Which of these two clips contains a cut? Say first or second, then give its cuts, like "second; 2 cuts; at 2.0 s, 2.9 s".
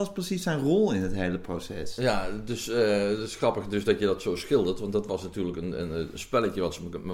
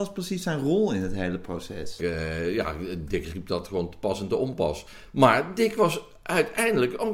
second; 1 cut; at 2.0 s